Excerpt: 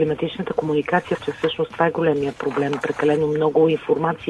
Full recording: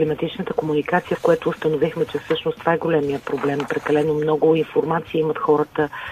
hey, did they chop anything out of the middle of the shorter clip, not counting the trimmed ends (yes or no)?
yes